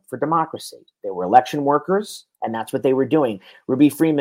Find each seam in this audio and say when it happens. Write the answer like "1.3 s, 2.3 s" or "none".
2.3 s